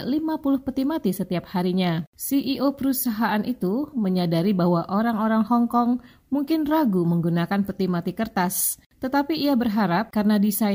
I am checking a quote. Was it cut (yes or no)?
yes